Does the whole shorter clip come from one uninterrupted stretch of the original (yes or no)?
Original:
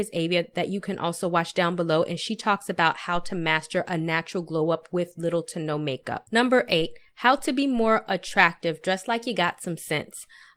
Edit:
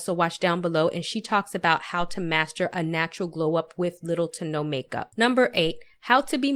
yes